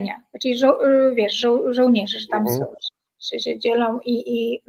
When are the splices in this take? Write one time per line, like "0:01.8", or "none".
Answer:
none